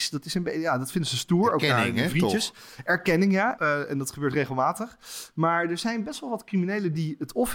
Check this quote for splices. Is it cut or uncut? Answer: cut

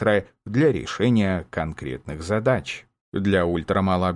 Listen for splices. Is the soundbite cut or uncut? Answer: uncut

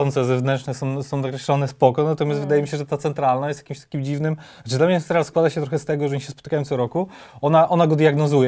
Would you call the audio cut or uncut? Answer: uncut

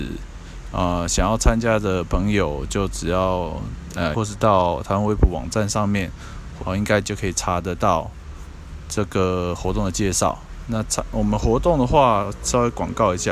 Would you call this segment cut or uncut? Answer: cut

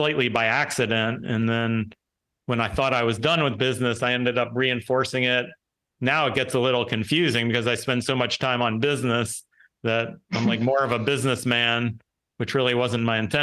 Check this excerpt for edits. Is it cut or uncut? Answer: uncut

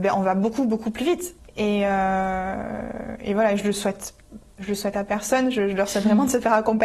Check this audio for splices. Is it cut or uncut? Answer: cut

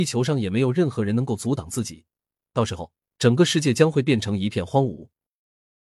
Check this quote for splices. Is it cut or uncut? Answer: cut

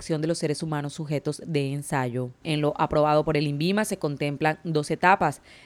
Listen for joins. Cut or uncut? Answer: cut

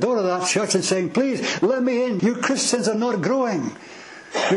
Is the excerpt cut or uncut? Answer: cut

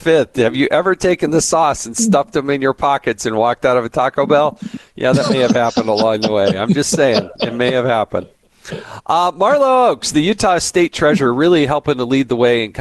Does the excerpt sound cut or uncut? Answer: uncut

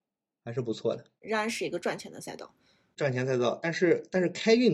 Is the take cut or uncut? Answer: uncut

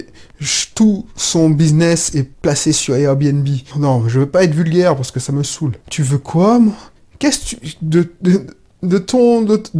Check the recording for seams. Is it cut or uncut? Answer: cut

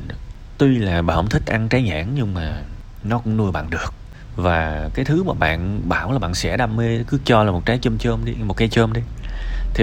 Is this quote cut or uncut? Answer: cut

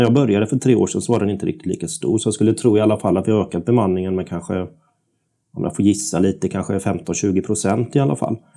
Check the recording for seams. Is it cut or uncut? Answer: uncut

